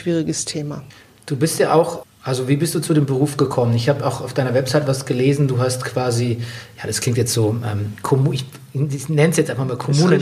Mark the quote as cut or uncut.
cut